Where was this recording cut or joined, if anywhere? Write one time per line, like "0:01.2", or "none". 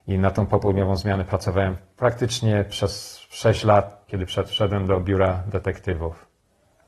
0:04.1